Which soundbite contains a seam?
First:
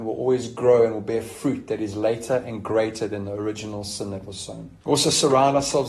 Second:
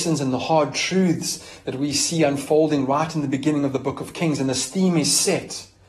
first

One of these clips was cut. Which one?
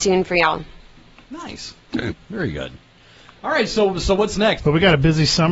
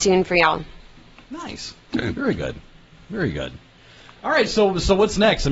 first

